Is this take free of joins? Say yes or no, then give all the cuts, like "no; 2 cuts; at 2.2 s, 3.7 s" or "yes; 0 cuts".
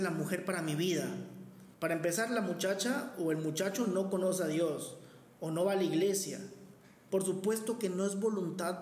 no; 2 cuts; at 1.7 s, 7.1 s